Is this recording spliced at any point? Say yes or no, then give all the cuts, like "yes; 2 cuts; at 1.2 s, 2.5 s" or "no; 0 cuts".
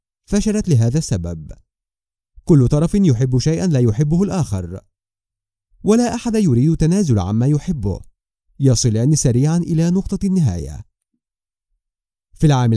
no; 0 cuts